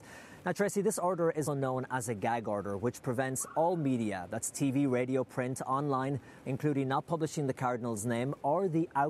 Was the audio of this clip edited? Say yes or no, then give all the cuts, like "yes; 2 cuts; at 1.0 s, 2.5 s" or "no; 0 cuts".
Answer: yes; 2 cuts; at 1.5 s, 6.4 s